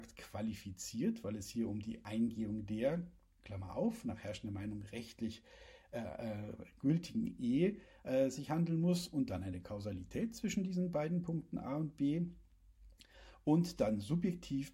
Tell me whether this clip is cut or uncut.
uncut